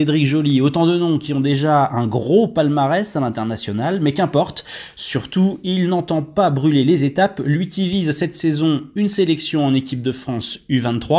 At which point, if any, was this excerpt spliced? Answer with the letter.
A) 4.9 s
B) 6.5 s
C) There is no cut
A